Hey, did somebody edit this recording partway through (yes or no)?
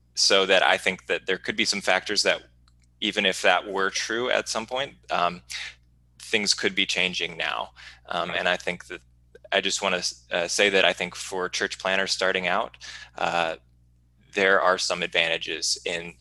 no